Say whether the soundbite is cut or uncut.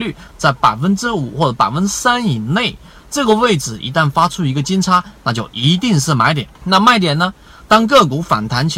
cut